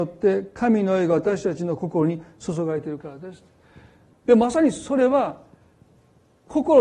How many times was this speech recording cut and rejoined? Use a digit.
1